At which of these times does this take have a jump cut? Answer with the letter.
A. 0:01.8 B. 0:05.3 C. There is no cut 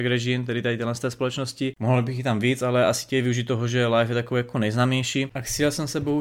C